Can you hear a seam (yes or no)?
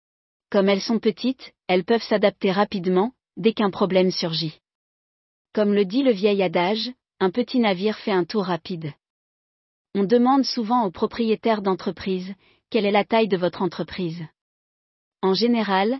no